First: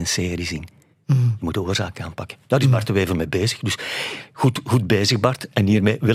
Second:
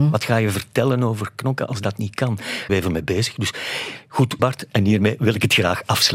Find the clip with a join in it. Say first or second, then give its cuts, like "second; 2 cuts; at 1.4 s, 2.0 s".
second; 2 cuts; at 2.7 s, 4.4 s